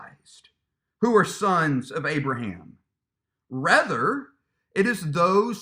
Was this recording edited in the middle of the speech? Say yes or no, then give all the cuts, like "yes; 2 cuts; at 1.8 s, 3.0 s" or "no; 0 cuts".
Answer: no; 0 cuts